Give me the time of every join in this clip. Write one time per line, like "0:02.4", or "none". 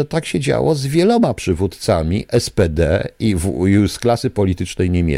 none